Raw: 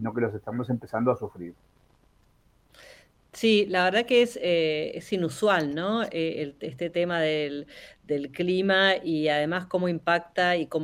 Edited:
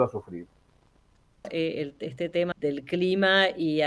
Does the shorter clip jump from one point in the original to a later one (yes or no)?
yes